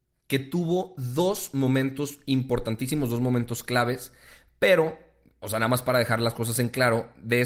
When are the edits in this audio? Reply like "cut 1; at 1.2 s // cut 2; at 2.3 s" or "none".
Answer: none